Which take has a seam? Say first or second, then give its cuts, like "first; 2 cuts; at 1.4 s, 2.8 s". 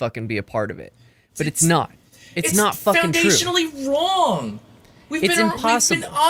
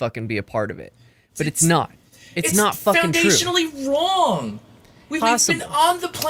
second; 1 cut; at 5.2 s